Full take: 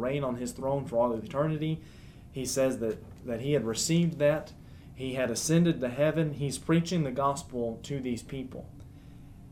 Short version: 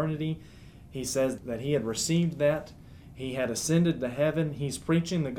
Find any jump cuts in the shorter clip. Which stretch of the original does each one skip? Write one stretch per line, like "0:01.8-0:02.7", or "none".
0:02.8-0:03.2

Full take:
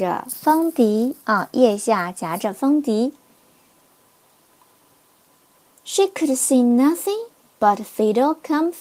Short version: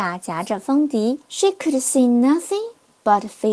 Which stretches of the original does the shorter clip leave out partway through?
0:03.2-0:05.8

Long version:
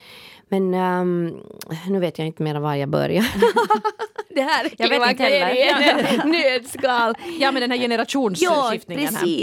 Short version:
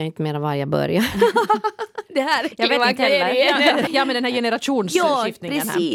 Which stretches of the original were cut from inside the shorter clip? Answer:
0:06.1-0:07.3

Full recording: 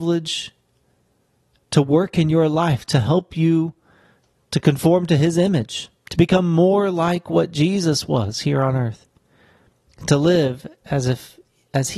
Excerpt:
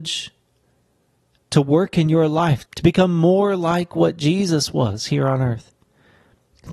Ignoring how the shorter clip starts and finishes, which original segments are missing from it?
0:02.9-0:06.0

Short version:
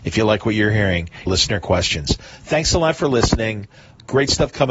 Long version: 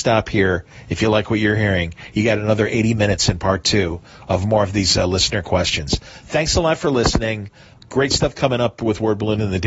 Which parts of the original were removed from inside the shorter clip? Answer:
0:02.1-0:05.1

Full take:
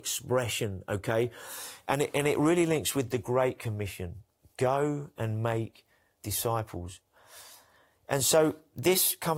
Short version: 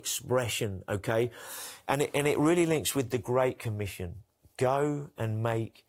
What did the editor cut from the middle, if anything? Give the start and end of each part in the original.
none

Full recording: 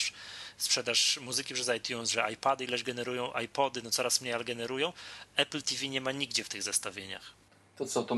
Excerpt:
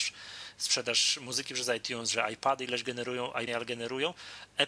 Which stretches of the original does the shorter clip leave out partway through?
0:03.5-0:04.3

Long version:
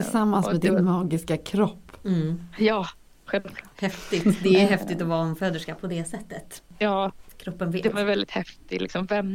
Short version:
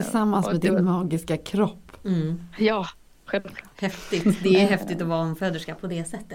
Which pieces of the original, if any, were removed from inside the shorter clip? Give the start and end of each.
none

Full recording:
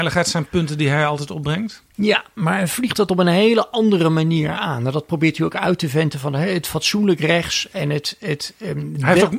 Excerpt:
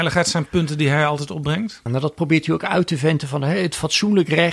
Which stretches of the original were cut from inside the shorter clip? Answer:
0:01.9-0:04.8

